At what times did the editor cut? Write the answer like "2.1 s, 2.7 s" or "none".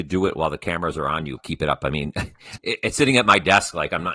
1.4 s, 2.6 s